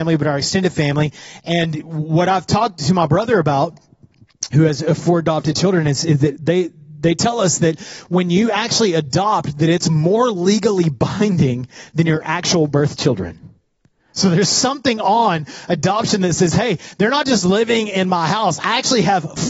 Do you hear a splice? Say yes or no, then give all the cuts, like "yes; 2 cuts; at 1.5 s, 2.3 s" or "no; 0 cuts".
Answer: no; 0 cuts